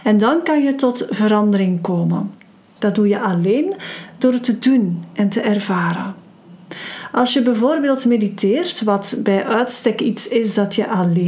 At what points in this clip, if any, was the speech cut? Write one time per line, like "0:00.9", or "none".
0:02.8